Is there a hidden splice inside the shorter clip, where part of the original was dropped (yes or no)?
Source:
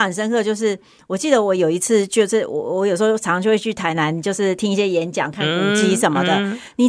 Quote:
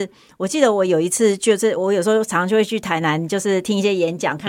yes